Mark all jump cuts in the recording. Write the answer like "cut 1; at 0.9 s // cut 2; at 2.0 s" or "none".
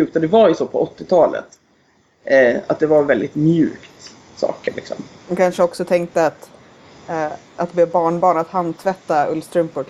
none